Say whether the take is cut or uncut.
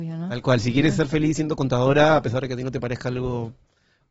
uncut